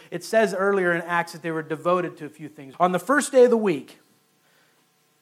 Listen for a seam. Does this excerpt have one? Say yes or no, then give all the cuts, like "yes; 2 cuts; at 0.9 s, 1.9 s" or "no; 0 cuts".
yes; 1 cut; at 2.7 s